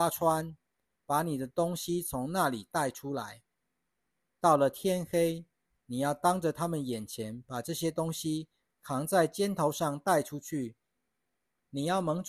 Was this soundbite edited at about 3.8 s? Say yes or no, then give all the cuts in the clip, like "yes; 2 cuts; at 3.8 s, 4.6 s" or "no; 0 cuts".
no; 0 cuts